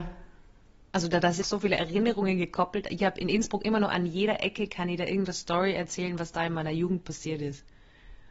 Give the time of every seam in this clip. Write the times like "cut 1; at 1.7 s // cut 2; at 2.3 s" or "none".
cut 1; at 1.4 s